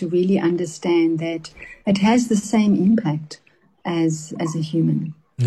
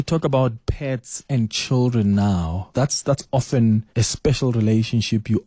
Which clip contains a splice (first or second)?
second